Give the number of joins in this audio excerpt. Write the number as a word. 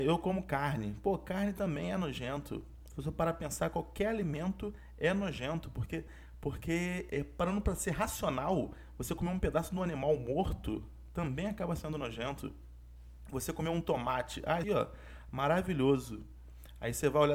two